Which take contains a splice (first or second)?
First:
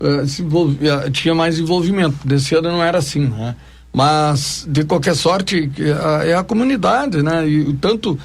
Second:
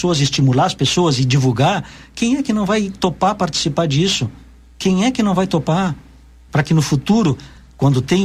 second